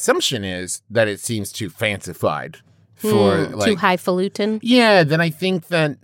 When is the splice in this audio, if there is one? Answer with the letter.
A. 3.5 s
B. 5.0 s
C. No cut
A